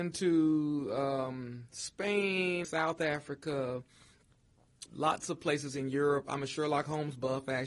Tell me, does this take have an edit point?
yes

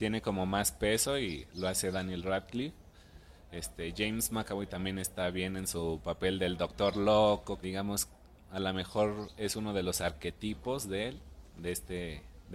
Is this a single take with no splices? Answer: no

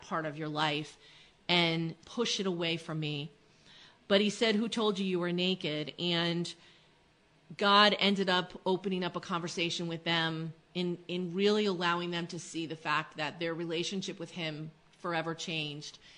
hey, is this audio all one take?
yes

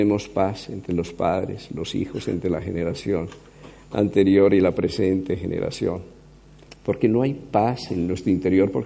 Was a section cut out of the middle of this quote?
yes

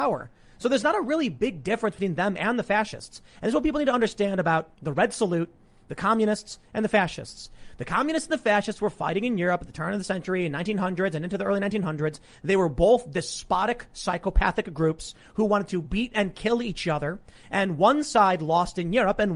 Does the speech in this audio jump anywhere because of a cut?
no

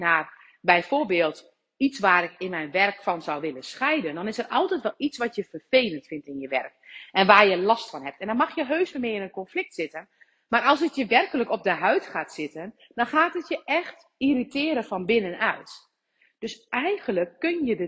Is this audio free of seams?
no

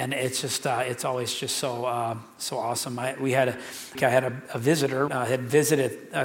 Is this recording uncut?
no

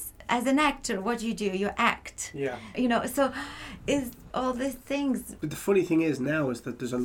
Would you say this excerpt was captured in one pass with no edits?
no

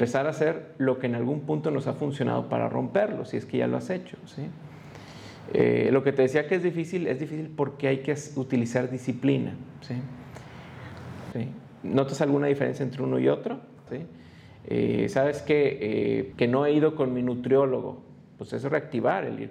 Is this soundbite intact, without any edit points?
no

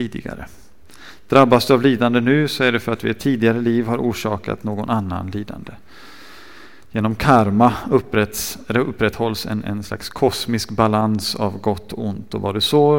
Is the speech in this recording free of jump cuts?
yes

